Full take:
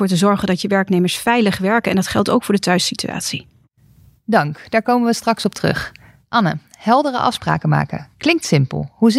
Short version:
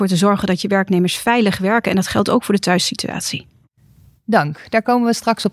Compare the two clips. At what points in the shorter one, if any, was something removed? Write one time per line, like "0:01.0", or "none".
none